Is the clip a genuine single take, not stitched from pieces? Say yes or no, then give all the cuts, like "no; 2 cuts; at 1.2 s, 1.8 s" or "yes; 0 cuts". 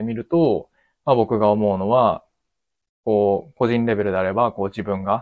yes; 0 cuts